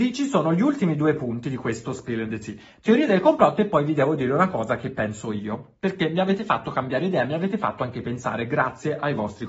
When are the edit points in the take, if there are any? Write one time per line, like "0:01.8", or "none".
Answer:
none